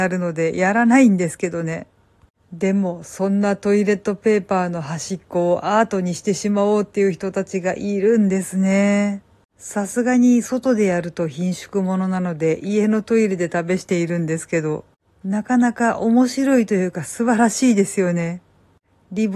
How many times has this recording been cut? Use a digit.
1